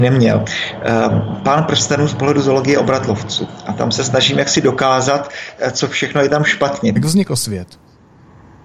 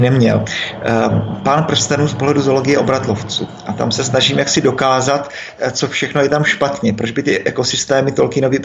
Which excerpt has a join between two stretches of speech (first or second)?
first